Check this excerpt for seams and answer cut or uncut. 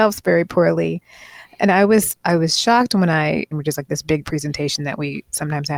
cut